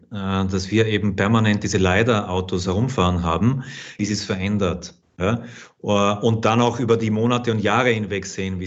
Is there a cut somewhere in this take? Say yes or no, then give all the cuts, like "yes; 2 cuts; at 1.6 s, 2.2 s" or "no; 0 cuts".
yes; 1 cut; at 4.0 s